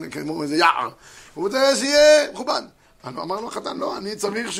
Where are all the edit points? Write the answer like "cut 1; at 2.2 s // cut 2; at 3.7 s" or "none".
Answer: none